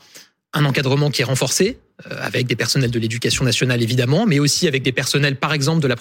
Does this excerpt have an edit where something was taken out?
no; 0 cuts

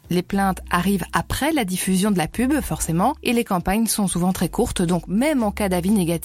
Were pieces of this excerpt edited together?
no; 0 cuts

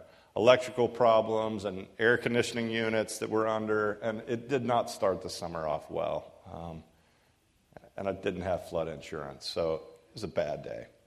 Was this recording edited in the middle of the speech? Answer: no; 0 cuts

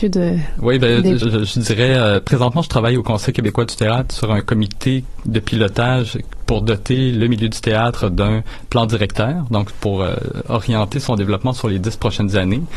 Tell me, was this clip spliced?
yes; 1 cut; at 1.2 s

